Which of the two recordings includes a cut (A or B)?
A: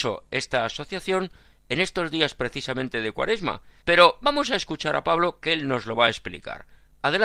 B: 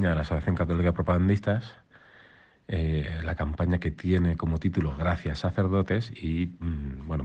A